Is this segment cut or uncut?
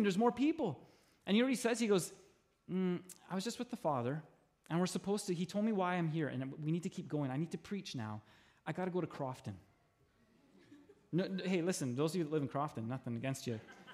uncut